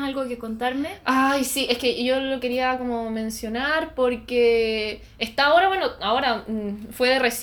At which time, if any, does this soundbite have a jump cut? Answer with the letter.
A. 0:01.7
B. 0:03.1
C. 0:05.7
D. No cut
D